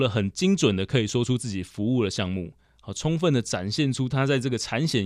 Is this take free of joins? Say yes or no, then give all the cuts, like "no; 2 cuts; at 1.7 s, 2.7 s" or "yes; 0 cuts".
yes; 0 cuts